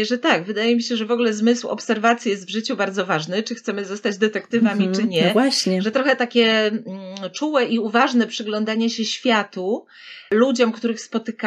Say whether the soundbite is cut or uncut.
uncut